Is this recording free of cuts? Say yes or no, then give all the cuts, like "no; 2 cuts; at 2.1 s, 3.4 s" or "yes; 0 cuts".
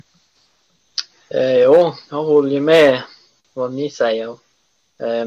yes; 0 cuts